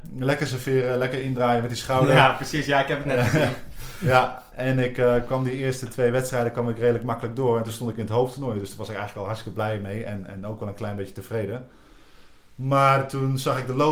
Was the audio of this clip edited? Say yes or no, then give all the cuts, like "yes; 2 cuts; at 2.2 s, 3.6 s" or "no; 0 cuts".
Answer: no; 0 cuts